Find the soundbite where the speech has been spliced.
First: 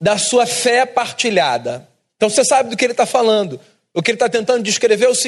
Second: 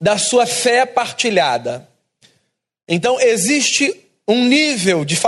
first; 1 cut; at 2.1 s

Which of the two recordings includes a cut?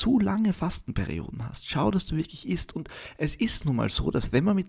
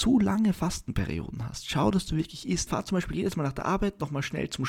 second; 1 cut; at 2.7 s

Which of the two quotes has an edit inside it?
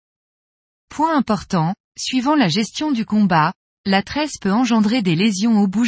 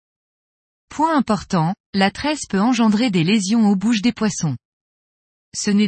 second; 1 cut; at 1.8 s

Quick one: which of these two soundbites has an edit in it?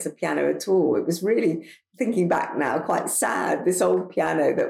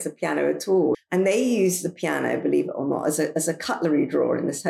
second; 1 cut; at 0.9 s

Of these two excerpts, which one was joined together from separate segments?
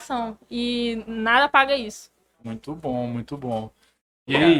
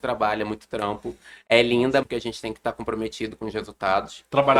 second; 1 cut; at 2.0 s

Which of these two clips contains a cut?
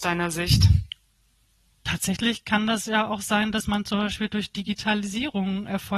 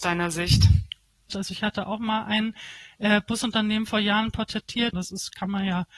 second; 2 cuts; at 1.3 s, 4.9 s

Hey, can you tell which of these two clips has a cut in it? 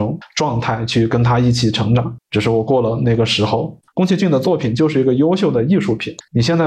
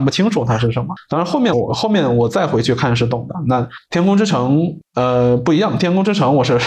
second; 1 cut; at 1.5 s

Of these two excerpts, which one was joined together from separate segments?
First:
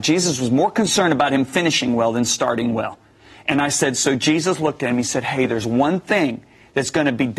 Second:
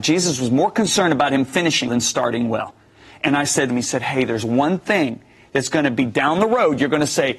second; 2 cuts; at 1.9 s, 3.7 s

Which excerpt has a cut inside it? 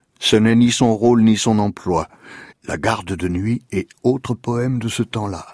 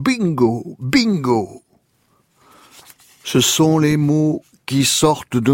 first; 1 cut; at 2.5 s

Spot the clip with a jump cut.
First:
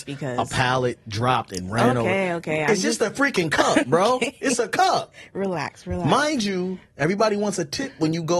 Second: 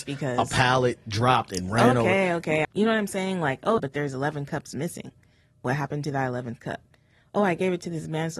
second; 2 cuts; at 2.6 s, 3.8 s

